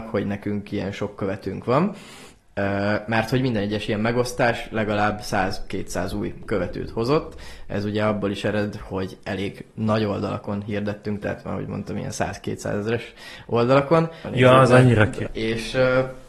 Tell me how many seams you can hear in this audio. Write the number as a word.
two